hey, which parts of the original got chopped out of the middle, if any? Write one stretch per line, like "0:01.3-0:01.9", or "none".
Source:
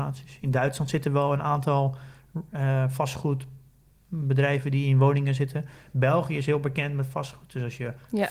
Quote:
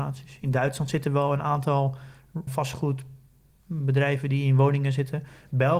0:02.5-0:02.9